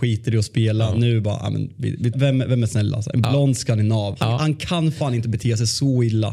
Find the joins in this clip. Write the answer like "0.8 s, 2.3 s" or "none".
2.1 s, 4.1 s